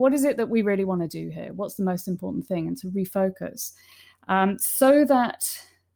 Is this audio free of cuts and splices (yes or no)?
yes